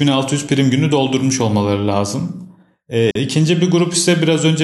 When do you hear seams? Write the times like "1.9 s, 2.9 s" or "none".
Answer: 3.1 s